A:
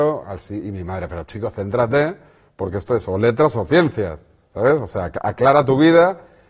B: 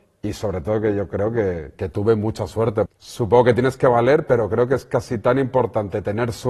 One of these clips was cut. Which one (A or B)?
B